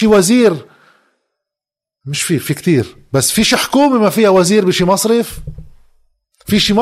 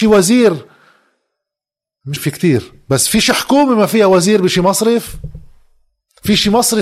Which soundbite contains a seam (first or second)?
second